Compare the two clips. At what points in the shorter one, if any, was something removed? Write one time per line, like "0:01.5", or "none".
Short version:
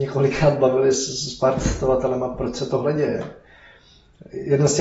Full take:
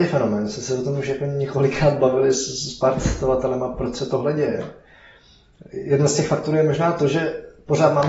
none

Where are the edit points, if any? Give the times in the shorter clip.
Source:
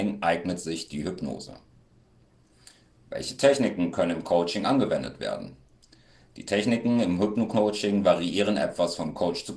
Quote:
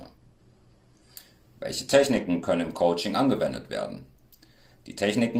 none

